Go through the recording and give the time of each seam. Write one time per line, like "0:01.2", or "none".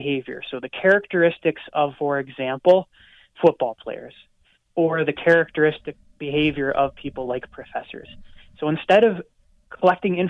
0:01.9